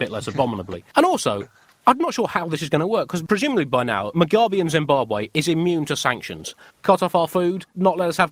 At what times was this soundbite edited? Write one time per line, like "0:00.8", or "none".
0:06.7